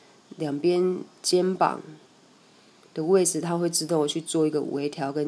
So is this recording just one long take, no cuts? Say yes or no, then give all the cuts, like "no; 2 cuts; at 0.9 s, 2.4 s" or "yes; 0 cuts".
yes; 0 cuts